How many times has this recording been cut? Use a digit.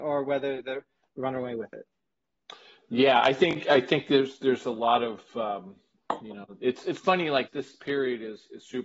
2